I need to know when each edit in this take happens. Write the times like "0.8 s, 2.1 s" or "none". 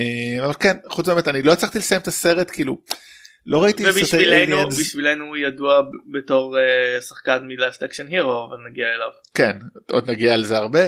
none